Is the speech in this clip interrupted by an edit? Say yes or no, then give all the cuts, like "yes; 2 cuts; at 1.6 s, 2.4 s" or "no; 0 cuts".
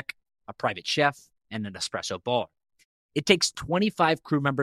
no; 0 cuts